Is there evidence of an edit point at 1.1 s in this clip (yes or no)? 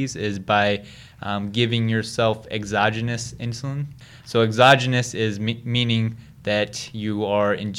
no